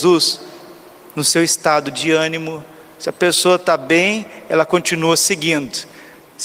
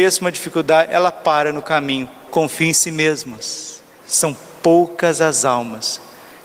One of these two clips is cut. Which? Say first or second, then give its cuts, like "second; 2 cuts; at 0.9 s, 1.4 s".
second; 2 cuts; at 2.3 s, 4.0 s